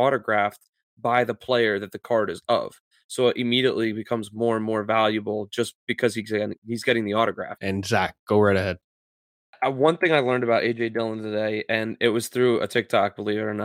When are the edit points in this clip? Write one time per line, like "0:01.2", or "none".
0:07.6